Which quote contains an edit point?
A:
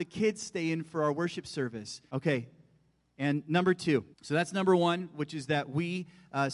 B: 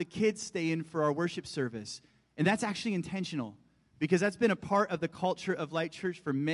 A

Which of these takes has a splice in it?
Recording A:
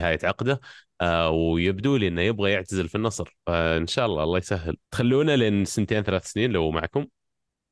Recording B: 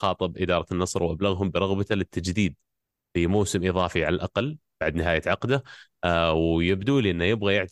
A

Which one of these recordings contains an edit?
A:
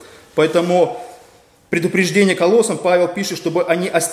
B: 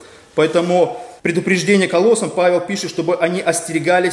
B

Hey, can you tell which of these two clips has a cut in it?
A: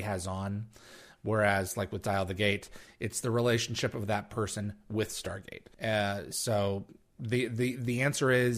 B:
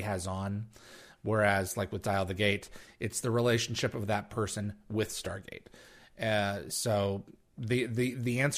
A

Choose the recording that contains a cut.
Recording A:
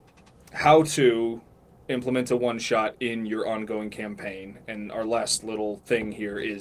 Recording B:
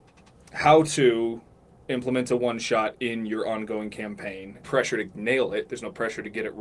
B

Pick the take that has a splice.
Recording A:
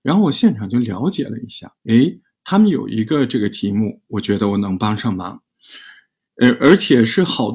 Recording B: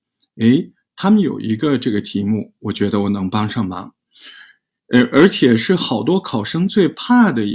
A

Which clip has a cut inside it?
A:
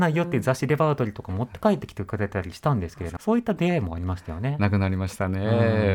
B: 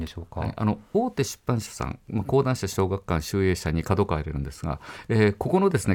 A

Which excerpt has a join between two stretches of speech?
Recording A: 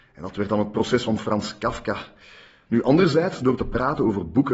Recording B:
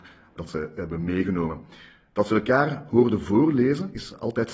A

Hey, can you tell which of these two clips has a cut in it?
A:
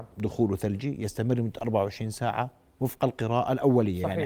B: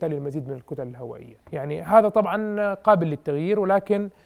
B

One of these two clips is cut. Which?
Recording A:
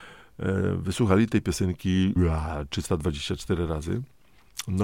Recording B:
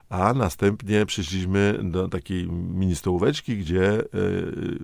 A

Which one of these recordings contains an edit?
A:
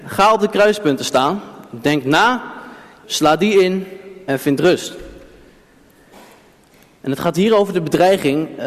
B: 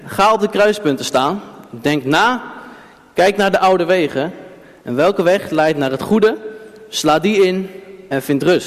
A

